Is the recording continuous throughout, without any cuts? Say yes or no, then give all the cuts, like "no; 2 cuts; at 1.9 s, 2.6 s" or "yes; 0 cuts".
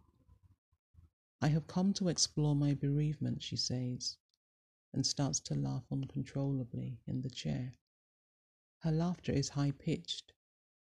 yes; 0 cuts